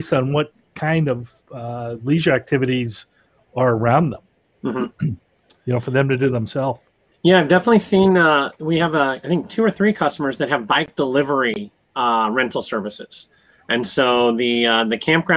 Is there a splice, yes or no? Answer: no